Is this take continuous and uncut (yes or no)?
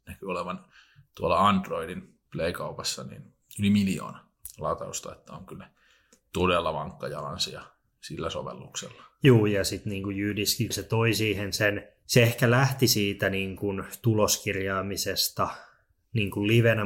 no